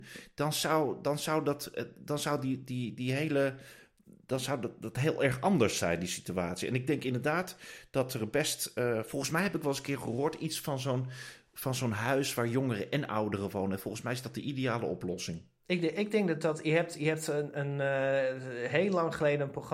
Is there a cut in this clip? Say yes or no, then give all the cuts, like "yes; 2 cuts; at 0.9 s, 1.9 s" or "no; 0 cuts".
no; 0 cuts